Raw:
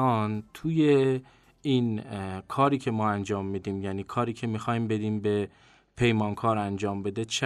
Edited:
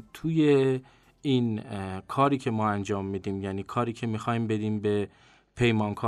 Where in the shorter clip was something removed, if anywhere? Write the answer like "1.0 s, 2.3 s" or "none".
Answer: none